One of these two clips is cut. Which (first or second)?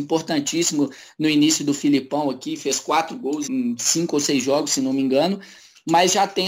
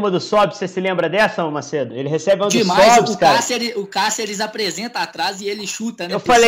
first